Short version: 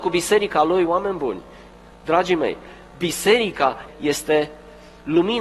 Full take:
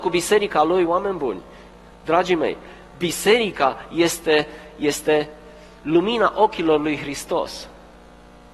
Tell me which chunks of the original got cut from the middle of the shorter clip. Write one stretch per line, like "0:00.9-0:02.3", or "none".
0:03.9-0:04.7